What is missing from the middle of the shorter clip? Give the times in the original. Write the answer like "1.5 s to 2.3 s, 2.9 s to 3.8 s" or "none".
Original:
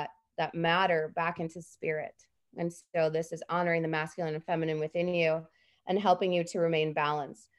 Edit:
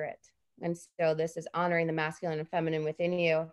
none